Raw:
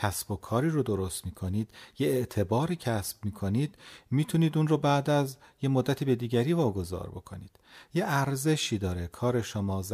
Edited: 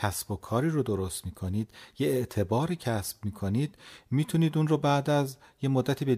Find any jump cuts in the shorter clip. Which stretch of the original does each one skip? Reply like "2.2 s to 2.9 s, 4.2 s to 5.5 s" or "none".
none